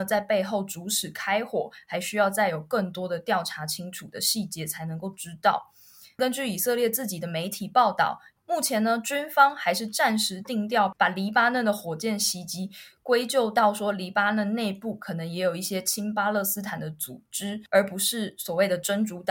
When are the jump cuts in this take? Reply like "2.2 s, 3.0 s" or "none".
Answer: none